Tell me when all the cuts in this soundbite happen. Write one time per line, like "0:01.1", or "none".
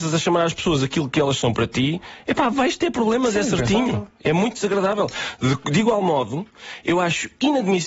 none